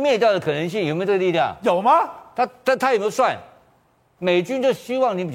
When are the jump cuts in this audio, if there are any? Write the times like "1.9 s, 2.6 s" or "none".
4.2 s